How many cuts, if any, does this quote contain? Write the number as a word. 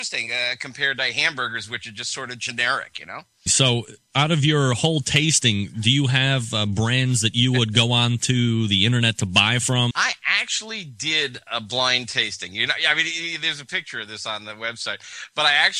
two